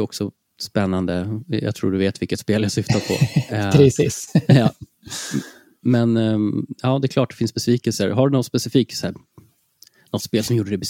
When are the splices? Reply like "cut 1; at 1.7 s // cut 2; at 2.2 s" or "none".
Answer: none